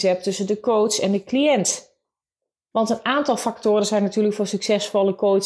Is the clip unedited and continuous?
yes; 0 cuts

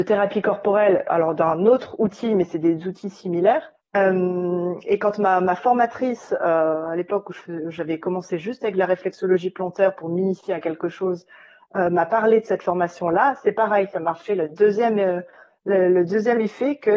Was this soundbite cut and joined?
no; 0 cuts

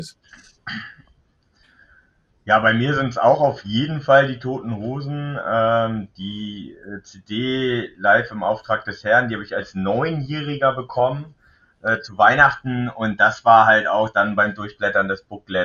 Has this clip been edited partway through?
no; 0 cuts

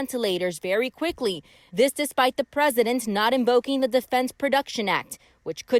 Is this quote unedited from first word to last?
no; 1 cut; at 1.7 s

